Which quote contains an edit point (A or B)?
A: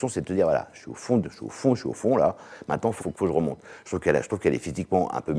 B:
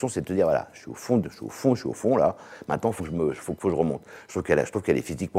A